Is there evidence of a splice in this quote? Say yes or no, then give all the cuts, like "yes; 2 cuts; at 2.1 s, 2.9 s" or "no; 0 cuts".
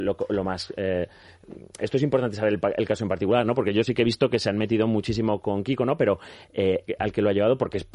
yes; 1 cut; at 6.9 s